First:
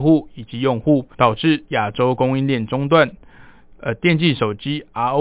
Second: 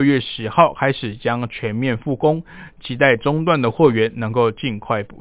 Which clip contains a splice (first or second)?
first